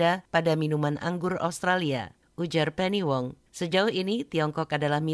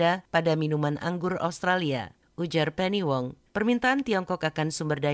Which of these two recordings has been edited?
second; 1 cut; at 3.5 s

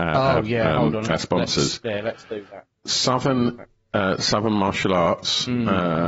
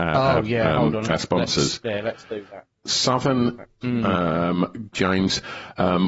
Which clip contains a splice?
second; 2 cuts; at 3.8 s, 4.9 s

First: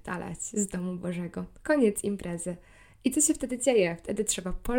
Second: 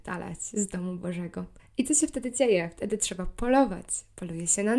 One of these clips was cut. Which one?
second; 1 cut; at 1.6 s

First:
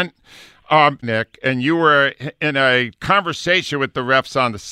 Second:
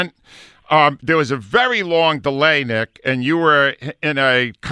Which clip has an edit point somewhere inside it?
first; 1 cut; at 1.0 s

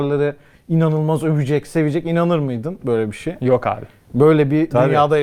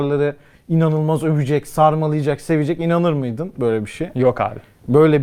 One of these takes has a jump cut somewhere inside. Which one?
first; 1 cut; at 1.6 s

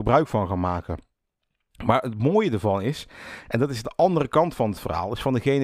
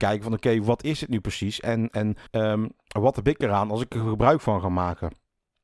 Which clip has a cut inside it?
second; 1 cut; at 2.3 s

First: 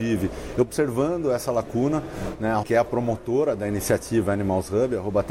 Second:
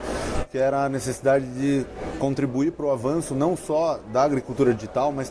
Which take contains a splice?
first; 1 cut; at 2.6 s

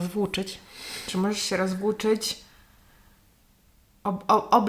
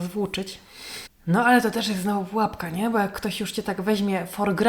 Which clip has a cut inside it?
second; 1 cut; at 1.1 s

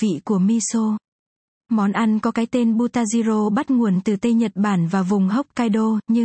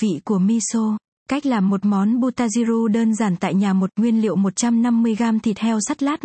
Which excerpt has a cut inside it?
second; 1 cut; at 1.2 s

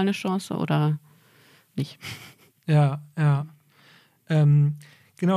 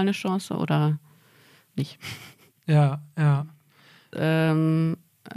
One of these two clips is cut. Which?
second; 1 cut; at 4.1 s

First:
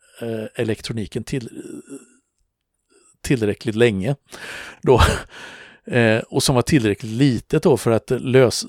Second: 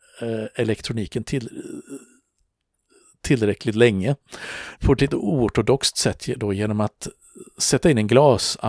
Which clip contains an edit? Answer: second; 1 cut; at 4.8 s

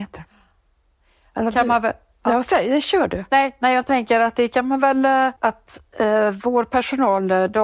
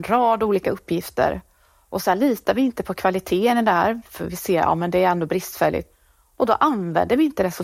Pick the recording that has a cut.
first; 2 cuts; at 1.5 s, 5.4 s

